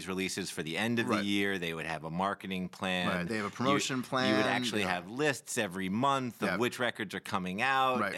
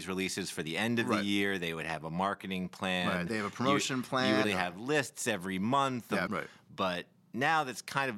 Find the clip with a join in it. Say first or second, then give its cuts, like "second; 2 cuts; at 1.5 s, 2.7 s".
second; 2 cuts; at 4.4 s, 6.3 s